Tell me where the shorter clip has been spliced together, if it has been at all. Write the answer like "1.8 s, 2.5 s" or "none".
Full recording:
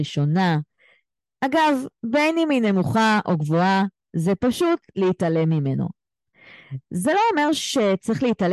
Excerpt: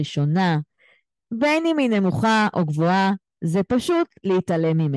1.2 s